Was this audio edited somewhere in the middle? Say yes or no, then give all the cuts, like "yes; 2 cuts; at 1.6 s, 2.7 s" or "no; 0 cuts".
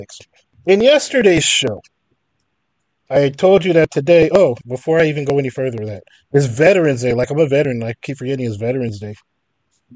yes; 1 cut; at 4.6 s